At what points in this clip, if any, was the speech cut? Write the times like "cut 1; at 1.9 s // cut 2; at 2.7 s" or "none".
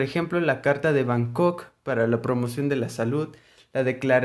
none